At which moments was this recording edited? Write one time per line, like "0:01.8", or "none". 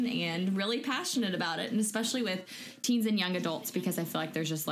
none